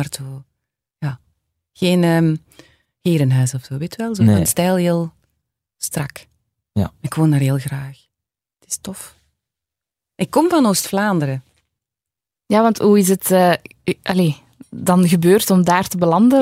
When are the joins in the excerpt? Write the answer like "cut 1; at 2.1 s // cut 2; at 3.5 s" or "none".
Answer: none